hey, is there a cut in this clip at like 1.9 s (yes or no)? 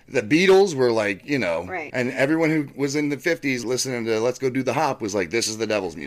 yes